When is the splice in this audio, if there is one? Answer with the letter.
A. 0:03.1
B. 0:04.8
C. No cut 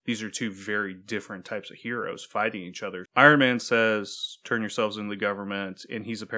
A